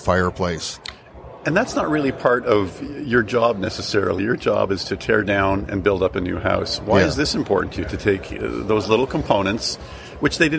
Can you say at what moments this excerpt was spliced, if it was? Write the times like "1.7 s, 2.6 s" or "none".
none